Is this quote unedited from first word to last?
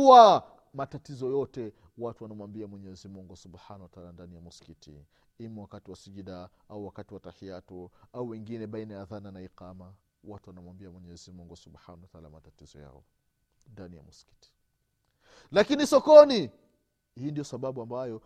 yes; 0 cuts

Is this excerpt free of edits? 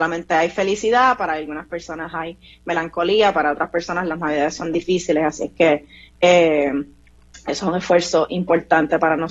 yes; 0 cuts

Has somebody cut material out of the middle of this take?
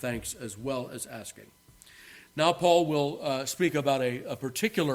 no; 0 cuts

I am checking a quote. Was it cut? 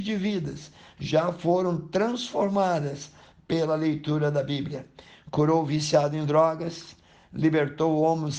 no; 0 cuts

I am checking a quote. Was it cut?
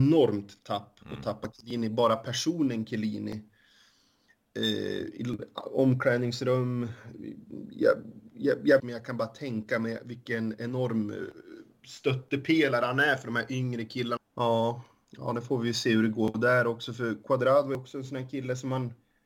yes; 2 cuts; at 8.8 s, 14.2 s

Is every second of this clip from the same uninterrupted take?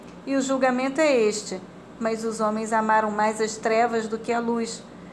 no; 1 cut; at 2.0 s

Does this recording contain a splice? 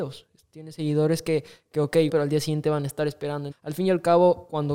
yes; 2 cuts; at 2.1 s, 3.5 s

